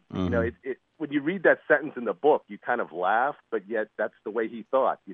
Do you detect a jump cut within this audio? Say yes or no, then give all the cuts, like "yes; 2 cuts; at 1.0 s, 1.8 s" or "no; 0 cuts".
no; 0 cuts